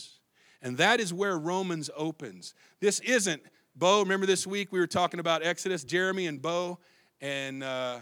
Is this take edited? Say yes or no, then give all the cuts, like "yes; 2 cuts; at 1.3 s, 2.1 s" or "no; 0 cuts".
no; 0 cuts